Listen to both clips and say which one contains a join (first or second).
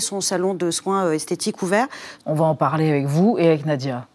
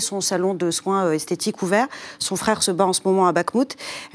first